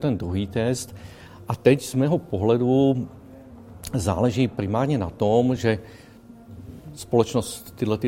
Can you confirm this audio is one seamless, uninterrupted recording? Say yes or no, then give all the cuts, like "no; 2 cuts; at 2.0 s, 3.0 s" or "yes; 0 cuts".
yes; 0 cuts